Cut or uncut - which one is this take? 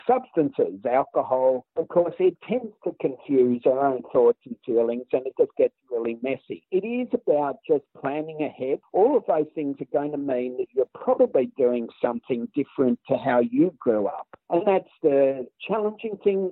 uncut